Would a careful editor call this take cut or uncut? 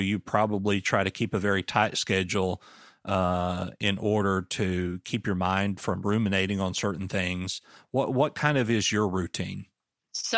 uncut